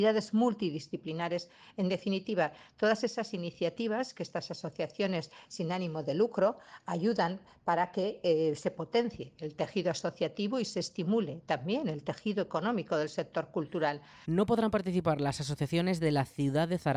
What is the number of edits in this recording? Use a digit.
1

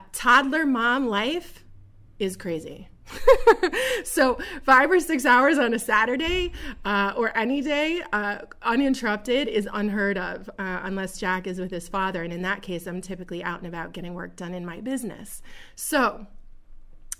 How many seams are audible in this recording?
0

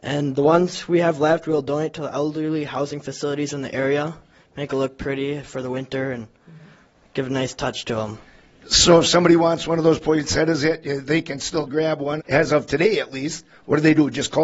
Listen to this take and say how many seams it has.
1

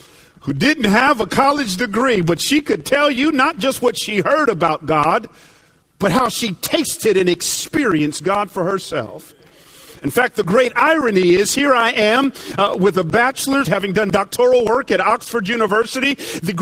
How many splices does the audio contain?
1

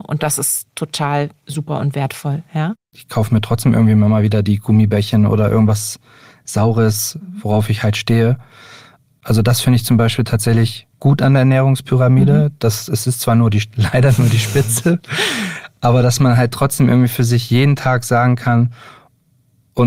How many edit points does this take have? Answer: 0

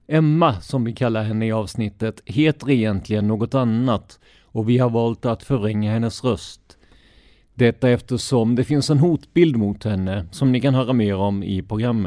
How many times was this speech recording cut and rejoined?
0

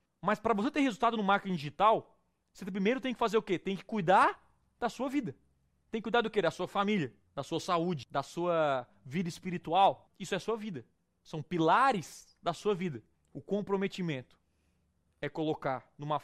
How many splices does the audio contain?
1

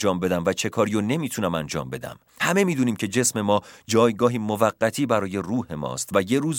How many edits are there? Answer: 1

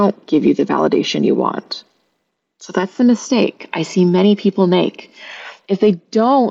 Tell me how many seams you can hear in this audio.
0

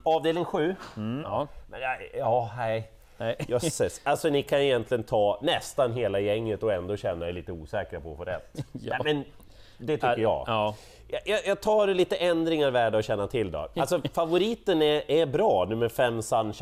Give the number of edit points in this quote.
2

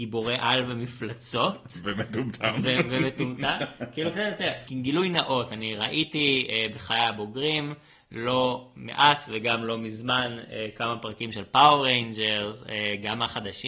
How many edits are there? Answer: 0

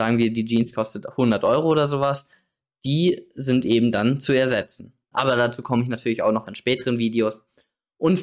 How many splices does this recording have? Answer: 1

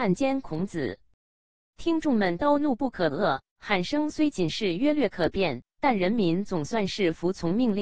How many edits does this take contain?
1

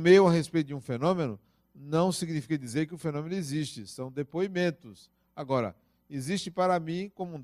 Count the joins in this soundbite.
0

